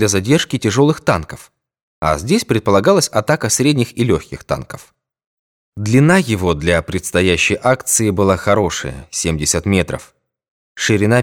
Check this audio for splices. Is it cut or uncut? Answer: uncut